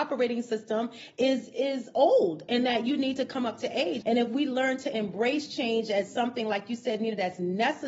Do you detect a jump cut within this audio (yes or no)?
yes